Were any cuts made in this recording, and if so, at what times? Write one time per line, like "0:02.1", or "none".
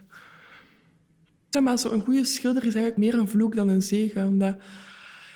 0:01.5